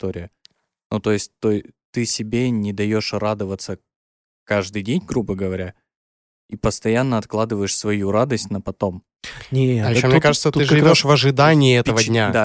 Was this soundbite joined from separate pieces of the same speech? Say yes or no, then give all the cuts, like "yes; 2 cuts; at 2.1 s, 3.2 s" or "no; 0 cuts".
no; 0 cuts